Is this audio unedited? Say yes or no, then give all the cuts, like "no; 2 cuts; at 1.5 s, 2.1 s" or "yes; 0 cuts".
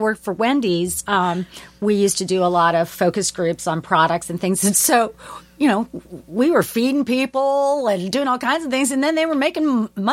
yes; 0 cuts